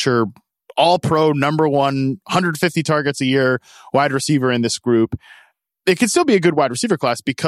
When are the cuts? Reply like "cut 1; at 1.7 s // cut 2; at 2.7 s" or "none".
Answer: none